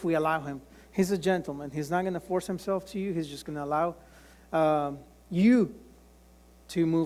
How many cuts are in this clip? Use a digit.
0